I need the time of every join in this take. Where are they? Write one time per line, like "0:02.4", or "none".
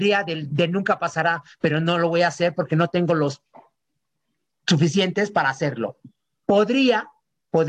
0:06.4